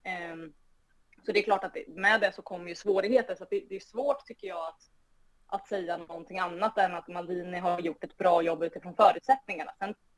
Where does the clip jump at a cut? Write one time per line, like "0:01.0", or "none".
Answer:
none